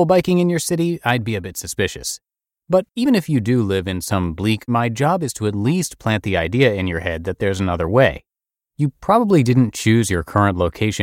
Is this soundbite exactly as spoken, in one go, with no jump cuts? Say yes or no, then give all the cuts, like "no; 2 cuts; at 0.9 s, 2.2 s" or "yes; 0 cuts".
no; 1 cut; at 4.7 s